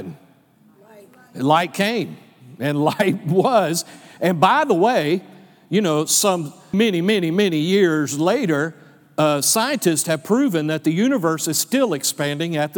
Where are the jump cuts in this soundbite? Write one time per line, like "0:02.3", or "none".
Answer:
0:06.7